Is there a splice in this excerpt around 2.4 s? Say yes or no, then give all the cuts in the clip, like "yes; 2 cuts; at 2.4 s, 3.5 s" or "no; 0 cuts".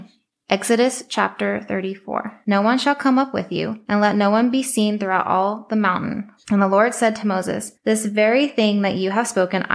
yes; 2 cuts; at 2.4 s, 6.4 s